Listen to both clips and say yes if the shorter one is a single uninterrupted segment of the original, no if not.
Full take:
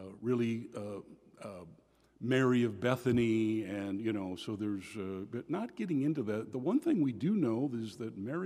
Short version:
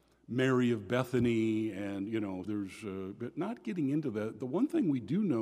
no